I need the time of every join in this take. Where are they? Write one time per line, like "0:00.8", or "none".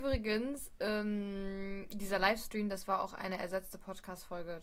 none